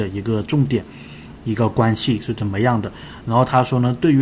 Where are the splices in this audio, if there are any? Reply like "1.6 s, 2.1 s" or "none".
1.4 s, 3.2 s